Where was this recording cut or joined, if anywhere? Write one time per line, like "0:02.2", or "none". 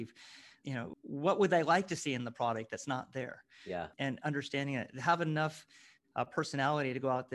none